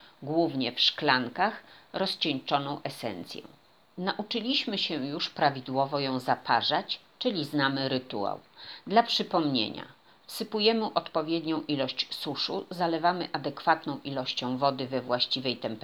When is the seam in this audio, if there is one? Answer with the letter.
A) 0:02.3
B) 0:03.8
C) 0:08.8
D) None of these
B